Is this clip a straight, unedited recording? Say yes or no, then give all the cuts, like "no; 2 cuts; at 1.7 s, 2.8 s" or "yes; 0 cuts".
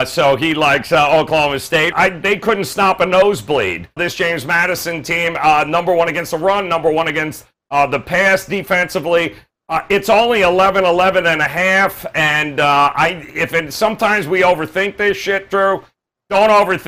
no; 2 cuts; at 1.9 s, 4.0 s